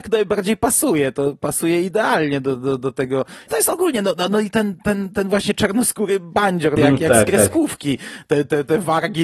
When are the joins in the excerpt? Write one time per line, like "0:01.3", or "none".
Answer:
0:03.5
0:06.8